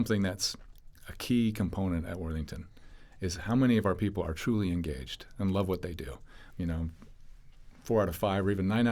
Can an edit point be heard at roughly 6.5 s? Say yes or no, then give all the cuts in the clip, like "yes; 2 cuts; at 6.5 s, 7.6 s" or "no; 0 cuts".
yes; 1 cut; at 6.5 s